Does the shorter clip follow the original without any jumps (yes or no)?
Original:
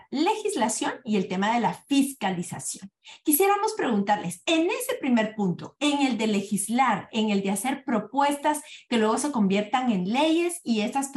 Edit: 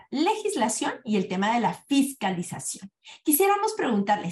yes